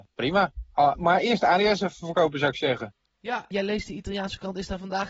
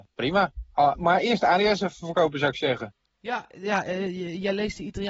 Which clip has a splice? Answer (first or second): first